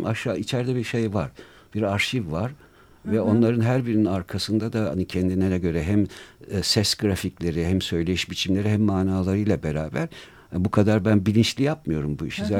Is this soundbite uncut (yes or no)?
yes